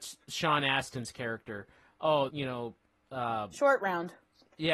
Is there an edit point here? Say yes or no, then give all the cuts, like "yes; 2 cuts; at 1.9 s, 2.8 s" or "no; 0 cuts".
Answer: yes; 1 cut; at 2.3 s